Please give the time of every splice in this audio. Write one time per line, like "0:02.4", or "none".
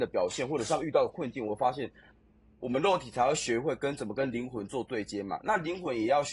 0:02.5